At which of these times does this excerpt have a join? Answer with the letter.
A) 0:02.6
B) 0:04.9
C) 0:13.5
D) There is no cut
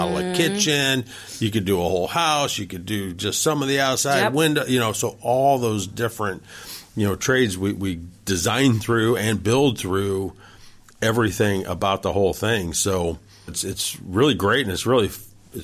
C